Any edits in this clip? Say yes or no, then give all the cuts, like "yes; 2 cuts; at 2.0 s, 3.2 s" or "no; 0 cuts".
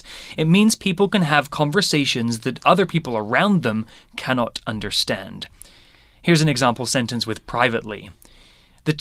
no; 0 cuts